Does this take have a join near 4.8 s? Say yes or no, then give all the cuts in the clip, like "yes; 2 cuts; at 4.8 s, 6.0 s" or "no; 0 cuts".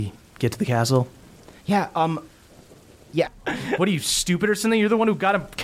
no; 2 cuts; at 1.6 s, 3.2 s